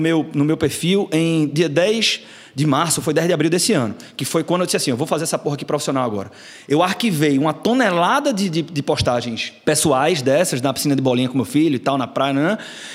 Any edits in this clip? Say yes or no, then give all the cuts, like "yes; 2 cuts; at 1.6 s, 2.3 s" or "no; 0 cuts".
no; 0 cuts